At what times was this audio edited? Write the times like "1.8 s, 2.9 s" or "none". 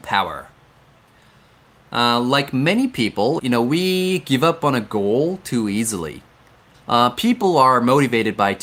3.4 s, 6.7 s